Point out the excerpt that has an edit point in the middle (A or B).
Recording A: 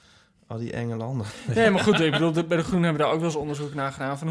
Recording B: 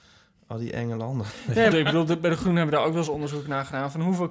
B